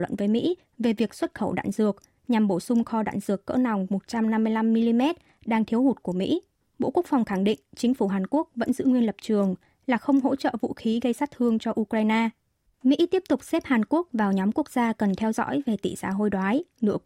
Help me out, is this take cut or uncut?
cut